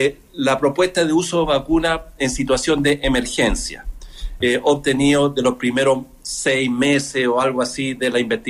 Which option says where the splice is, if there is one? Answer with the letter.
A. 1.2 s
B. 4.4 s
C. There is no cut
B